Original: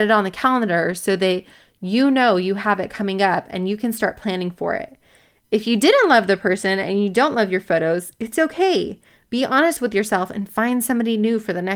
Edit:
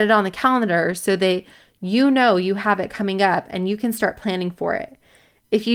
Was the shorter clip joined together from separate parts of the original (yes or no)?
no